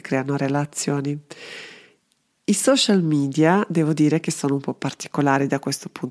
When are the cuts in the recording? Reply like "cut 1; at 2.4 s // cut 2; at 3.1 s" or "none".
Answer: none

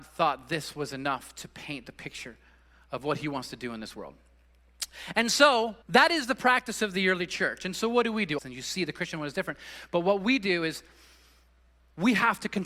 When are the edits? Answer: cut 1; at 5.8 s // cut 2; at 8.4 s

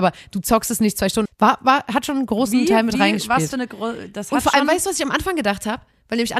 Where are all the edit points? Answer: cut 1; at 1.3 s

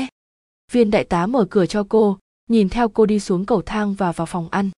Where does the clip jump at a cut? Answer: none

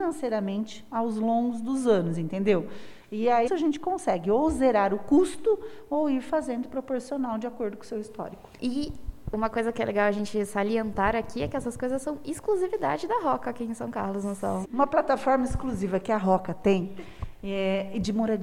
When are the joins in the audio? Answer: cut 1; at 3.5 s // cut 2; at 14.6 s

